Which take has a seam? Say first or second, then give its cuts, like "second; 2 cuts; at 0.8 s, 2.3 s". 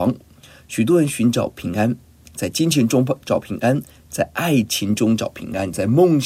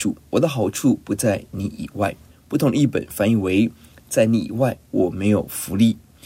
second; 1 cut; at 2.3 s